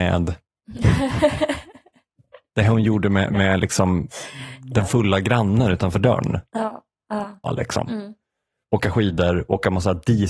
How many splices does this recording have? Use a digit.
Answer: 1